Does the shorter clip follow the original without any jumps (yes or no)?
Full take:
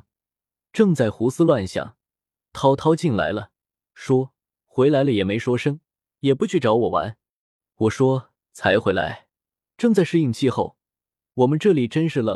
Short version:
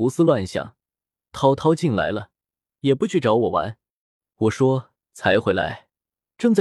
no